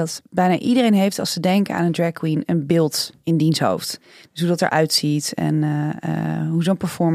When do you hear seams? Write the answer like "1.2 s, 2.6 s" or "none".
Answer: none